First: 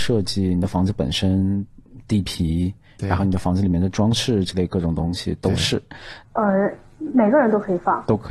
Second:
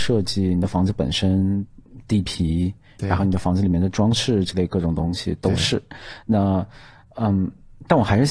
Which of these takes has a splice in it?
first; 1 cut; at 6.2 s

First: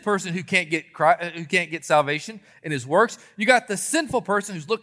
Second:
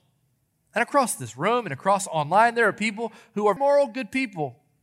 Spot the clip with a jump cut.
second; 1 cut; at 3.6 s

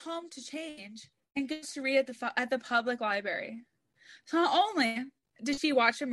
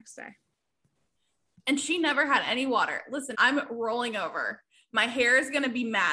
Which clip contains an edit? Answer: second; 1 cut; at 3.3 s

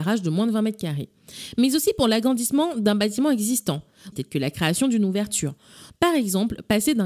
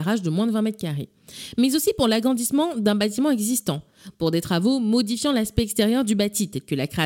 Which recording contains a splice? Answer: first; 2 cuts; at 4.1 s, 5.9 s

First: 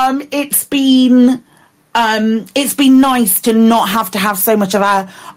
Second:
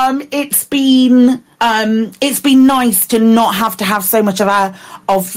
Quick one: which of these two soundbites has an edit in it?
second; 1 cut; at 1.5 s

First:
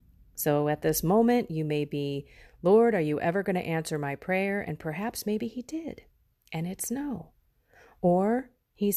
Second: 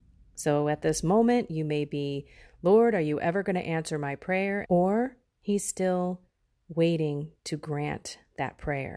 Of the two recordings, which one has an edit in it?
second; 1 cut; at 4.7 s

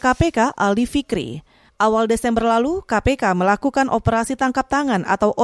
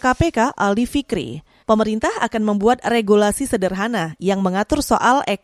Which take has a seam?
second; 1 cut; at 1.6 s

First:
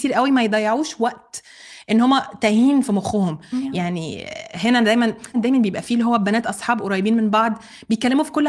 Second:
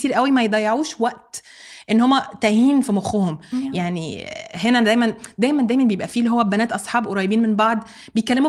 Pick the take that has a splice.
first; 1 cut; at 5.3 s

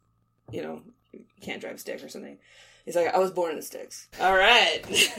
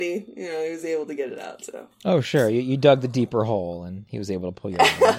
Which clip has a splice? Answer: first; 1 cut; at 4.1 s

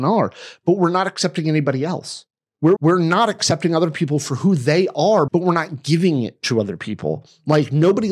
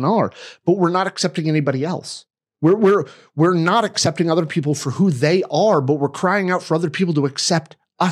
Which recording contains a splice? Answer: first; 2 cuts; at 2.8 s, 5.3 s

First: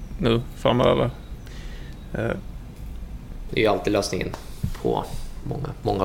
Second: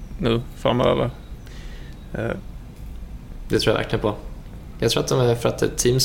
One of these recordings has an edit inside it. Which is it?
first; 1 cut; at 3.5 s

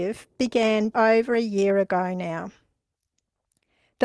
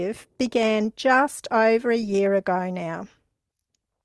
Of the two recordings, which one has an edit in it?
first; 1 cut; at 0.9 s

